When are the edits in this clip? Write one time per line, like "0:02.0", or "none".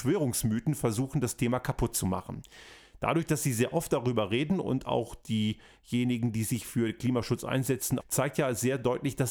0:08.0